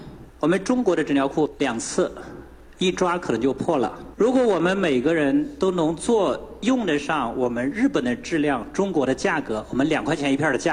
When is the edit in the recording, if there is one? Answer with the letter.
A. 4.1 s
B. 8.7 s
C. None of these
C